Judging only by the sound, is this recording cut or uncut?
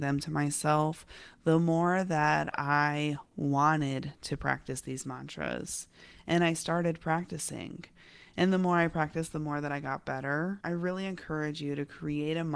uncut